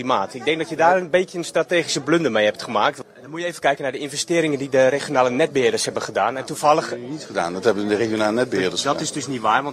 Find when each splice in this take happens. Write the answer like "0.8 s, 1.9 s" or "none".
none